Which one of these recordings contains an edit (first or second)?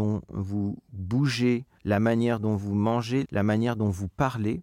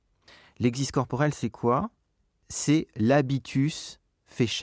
first